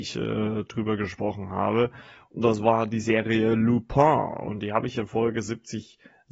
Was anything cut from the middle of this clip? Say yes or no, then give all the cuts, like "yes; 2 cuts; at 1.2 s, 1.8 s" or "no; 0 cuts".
no; 0 cuts